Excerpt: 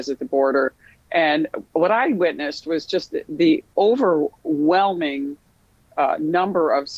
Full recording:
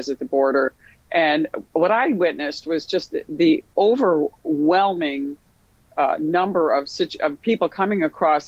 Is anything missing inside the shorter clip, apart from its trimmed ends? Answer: no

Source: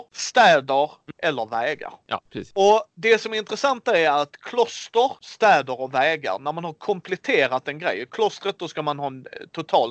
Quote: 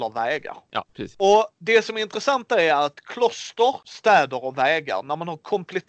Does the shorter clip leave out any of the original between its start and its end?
no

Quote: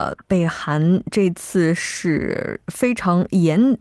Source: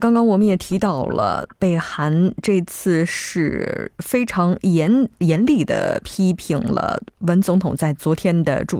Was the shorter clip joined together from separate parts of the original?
no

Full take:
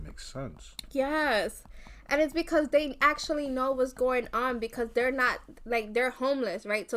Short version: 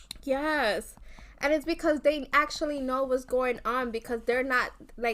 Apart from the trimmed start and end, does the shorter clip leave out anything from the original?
no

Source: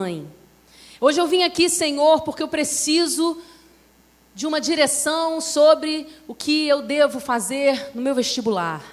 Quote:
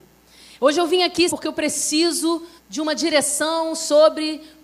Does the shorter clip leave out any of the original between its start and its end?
yes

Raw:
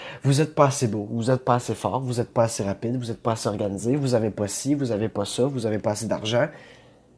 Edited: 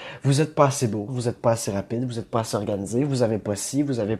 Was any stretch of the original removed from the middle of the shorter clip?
yes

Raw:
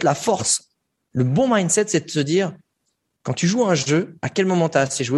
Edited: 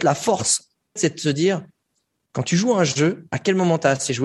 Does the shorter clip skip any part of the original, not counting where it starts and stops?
yes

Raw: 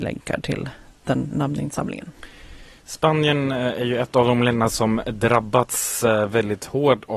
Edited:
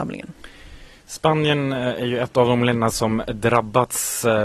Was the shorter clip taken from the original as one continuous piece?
yes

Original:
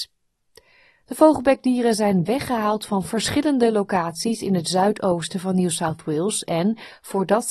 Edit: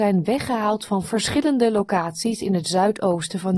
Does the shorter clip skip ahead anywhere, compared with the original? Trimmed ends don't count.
no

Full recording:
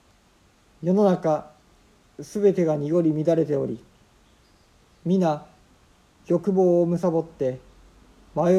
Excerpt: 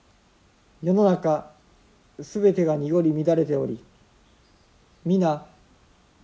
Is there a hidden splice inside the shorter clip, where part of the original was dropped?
no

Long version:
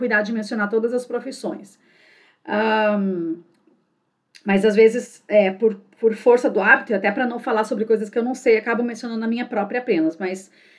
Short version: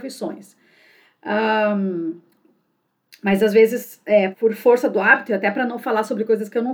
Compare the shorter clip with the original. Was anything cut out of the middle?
yes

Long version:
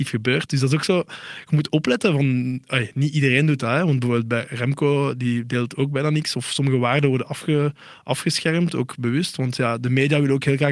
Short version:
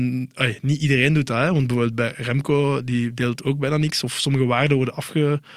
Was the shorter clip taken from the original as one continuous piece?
yes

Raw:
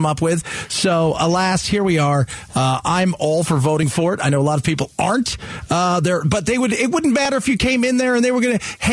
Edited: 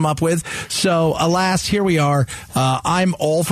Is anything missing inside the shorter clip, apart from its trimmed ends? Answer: no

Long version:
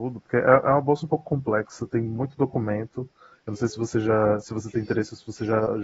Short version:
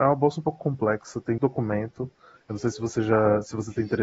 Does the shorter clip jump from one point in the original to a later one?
yes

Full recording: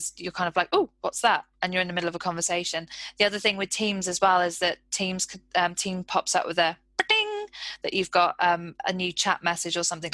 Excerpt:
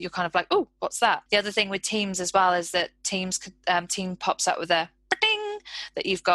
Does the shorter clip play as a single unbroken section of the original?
no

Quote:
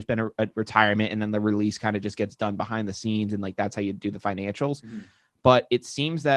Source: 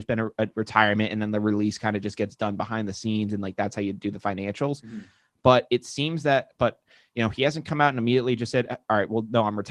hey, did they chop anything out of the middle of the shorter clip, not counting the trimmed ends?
no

